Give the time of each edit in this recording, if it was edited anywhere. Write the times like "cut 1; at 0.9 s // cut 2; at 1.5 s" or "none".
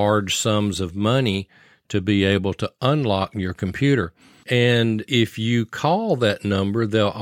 cut 1; at 4.4 s